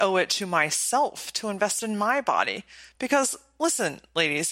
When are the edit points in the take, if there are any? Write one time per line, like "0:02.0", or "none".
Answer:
none